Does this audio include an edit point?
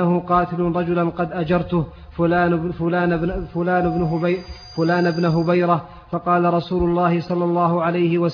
no; 0 cuts

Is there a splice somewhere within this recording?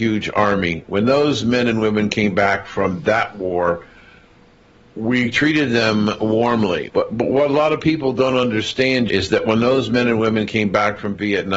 yes; 2 cuts; at 6.9 s, 9.1 s

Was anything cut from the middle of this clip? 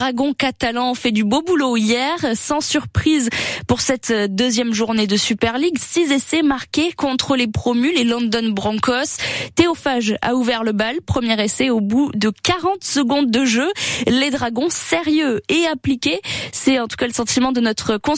no; 0 cuts

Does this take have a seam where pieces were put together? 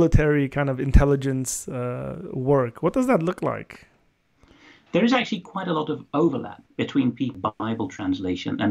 yes; 1 cut; at 6.7 s

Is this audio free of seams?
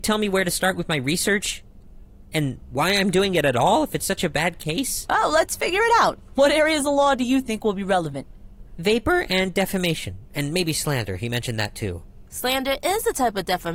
yes; 0 cuts

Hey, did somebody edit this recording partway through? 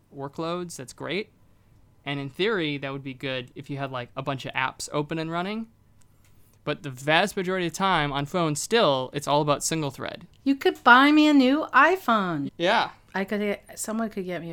yes; 2 cuts; at 10.3 s, 12.5 s

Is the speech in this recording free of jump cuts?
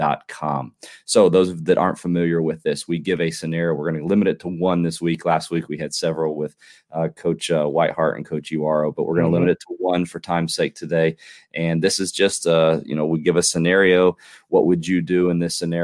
yes; 0 cuts

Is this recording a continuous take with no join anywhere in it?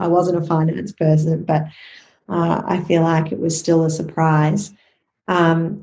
yes; 0 cuts

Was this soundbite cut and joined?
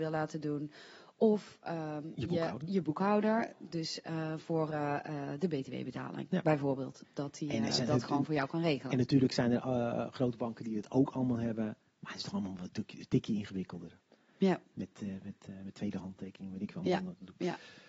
yes; 1 cut; at 7.0 s

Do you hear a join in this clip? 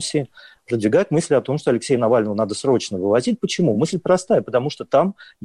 no; 0 cuts

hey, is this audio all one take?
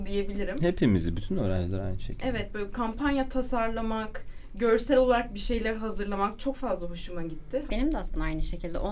no; 1 cut; at 7.7 s

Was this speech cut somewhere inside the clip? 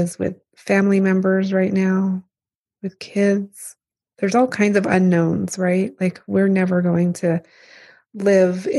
no; 0 cuts

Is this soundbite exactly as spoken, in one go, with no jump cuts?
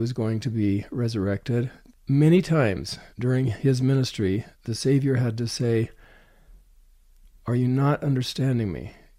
no; 3 cuts; at 1.9 s, 3.1 s, 4.5 s

